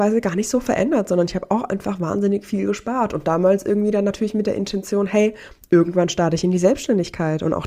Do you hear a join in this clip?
no; 0 cuts

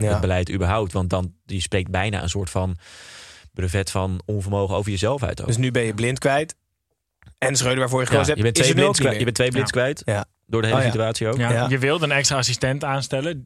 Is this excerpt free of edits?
yes; 0 cuts

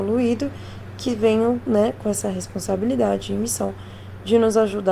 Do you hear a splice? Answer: no; 0 cuts

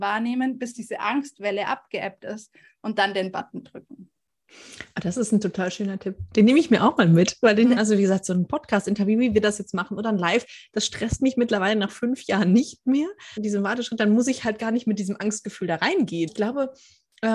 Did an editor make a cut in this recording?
yes; 3 cuts; at 7.8 s, 13.4 s, 16.3 s

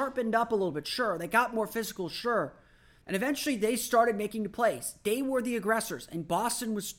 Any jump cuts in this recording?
yes; 1 cut; at 3.0 s

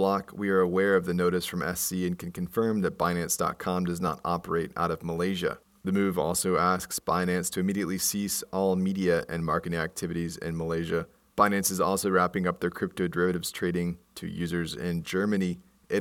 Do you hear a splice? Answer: yes; 1 cut; at 14.0 s

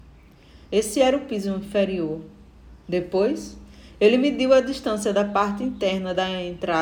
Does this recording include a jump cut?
no; 0 cuts

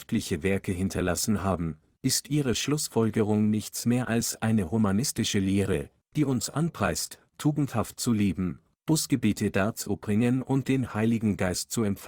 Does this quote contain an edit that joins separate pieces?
no; 0 cuts

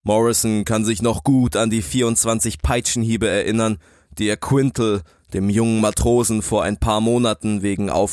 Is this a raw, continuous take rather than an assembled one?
yes; 0 cuts

